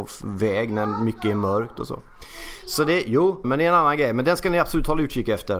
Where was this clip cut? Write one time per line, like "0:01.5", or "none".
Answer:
0:03.4